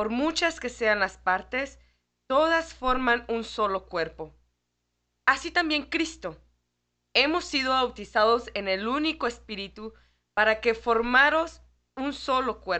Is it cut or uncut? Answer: uncut